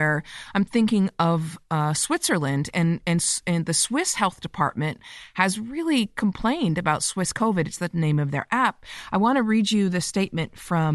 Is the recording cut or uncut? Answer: uncut